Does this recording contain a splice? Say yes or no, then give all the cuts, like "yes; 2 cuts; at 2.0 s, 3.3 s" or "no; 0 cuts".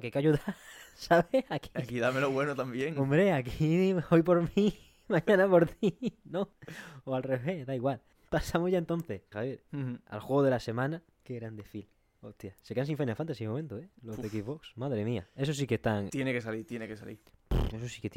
yes; 2 cuts; at 9.3 s, 11.1 s